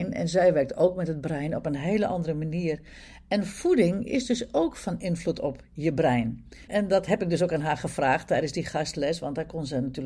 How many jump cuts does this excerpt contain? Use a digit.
1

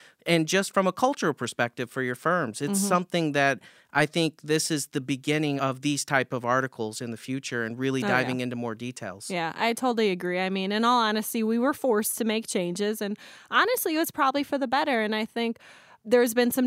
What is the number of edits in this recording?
1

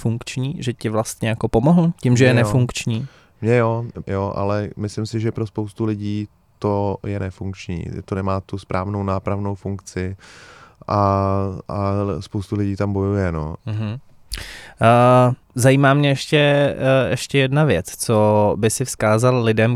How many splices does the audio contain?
3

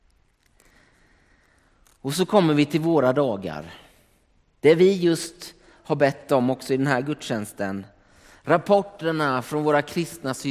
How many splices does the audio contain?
0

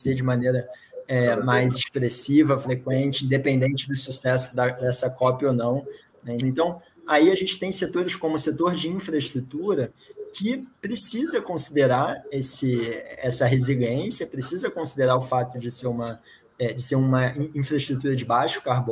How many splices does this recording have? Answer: 1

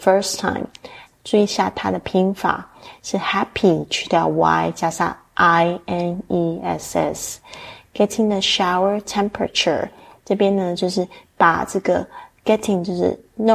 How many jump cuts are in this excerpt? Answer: 1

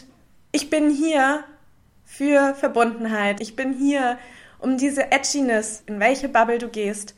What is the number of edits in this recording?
2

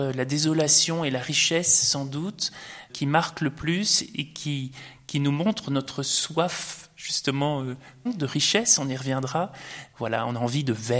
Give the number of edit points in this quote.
2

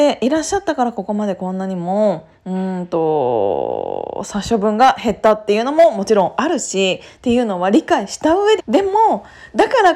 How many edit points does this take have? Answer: 1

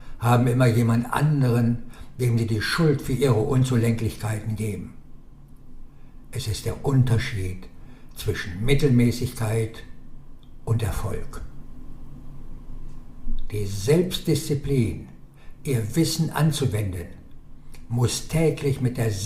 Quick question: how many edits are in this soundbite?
1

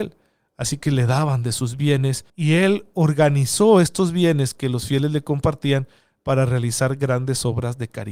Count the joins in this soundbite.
1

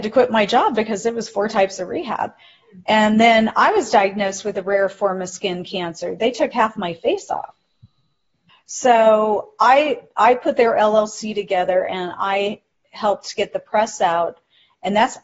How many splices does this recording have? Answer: 1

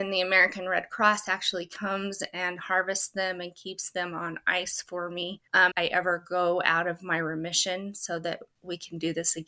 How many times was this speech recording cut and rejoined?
1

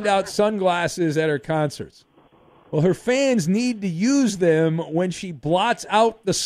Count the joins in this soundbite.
1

